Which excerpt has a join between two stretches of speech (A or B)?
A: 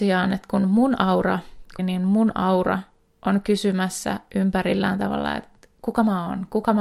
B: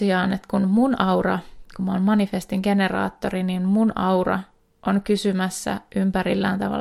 A